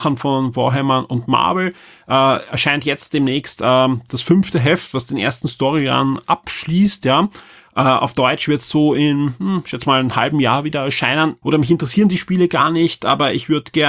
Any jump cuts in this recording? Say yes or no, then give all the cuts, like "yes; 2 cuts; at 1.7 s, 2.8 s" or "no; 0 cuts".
yes; 1 cut; at 11.4 s